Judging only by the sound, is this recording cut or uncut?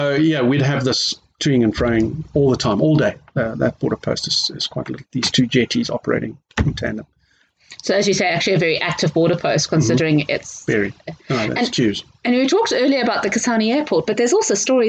uncut